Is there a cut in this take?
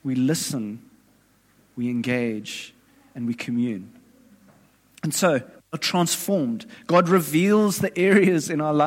no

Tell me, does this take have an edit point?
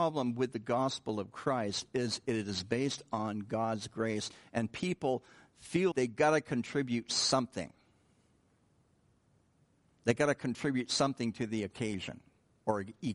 yes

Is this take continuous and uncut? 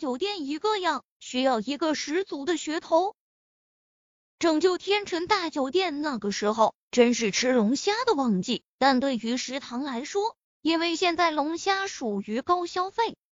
no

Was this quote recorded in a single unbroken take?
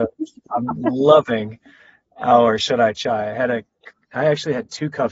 no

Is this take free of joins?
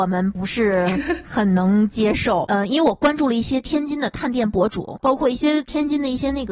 yes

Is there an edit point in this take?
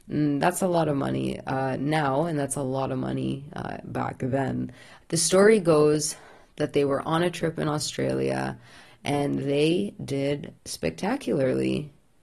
yes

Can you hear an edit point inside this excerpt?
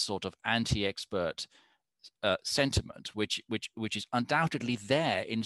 no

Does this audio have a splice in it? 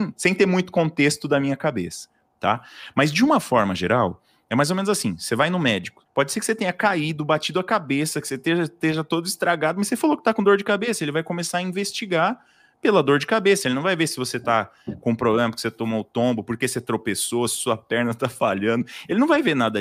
yes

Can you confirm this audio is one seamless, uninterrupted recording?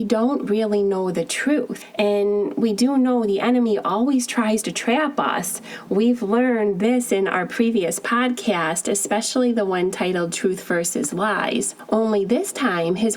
yes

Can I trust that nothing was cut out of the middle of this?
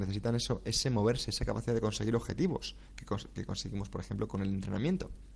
yes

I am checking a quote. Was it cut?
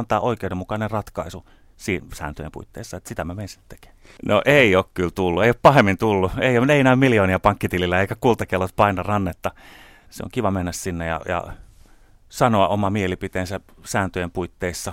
yes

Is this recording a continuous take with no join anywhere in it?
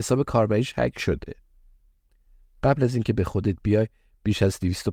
yes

